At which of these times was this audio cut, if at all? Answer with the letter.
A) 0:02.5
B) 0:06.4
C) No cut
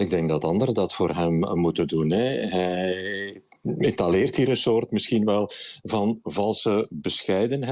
C